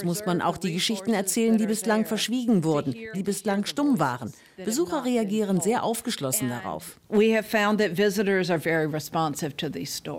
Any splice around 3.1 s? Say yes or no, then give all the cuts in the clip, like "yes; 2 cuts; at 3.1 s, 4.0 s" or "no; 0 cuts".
yes; 1 cut; at 3.1 s